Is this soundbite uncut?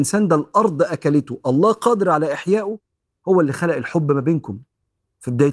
yes; 0 cuts

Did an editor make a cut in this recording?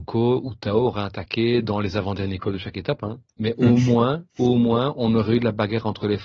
no; 0 cuts

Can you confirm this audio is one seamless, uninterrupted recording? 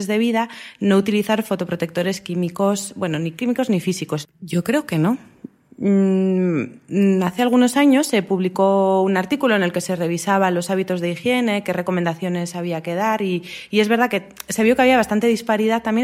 no; 1 cut; at 4.2 s

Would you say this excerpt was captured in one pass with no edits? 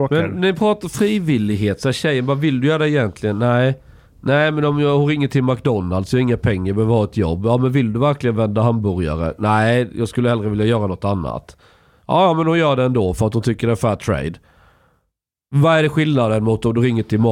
yes; 0 cuts

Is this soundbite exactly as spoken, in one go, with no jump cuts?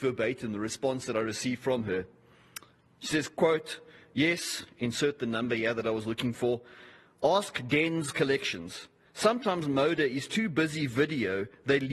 yes; 0 cuts

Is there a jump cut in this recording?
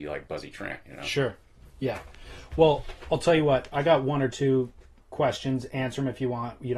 yes; 1 cut; at 5.0 s

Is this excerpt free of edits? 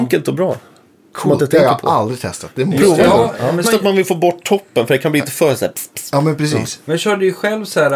no; 1 cut; at 3.6 s

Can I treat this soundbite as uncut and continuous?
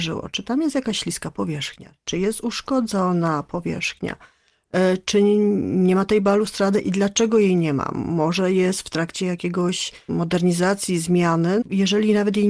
no; 2 cuts; at 10.1 s, 11.6 s

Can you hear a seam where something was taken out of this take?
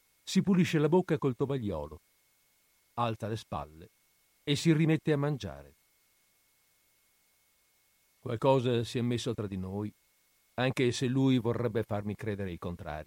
no; 0 cuts

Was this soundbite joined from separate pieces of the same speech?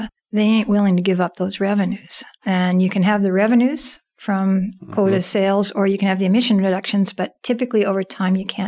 no; 0 cuts

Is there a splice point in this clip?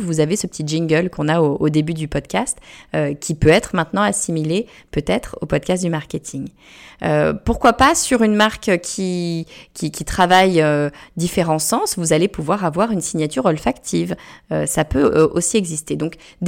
no; 0 cuts

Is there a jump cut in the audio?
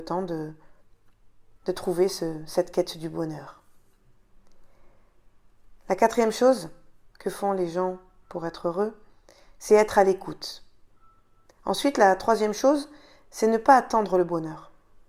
yes; 1 cut; at 11.4 s

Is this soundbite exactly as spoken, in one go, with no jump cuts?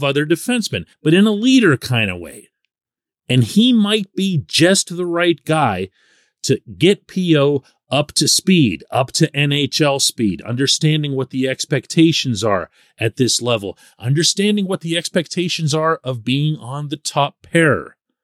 no; 1 cut; at 0.9 s

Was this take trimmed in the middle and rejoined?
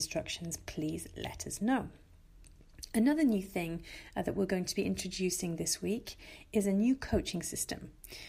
no; 0 cuts

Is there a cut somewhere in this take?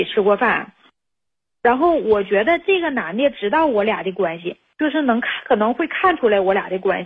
no; 0 cuts

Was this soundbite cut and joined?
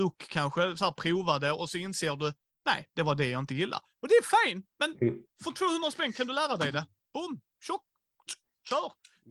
yes; 1 cut; at 4.7 s

